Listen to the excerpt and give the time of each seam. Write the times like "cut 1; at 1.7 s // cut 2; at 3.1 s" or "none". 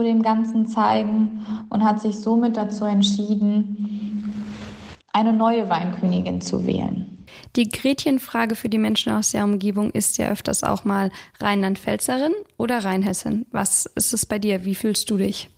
none